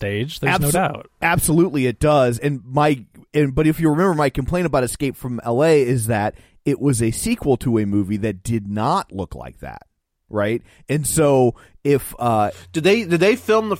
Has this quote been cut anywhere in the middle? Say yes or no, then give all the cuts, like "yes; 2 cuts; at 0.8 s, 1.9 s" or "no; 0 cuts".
no; 0 cuts